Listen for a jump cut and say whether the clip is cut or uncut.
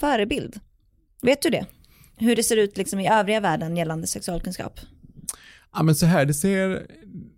uncut